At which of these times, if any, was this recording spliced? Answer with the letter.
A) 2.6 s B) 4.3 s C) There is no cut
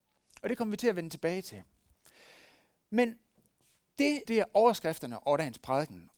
B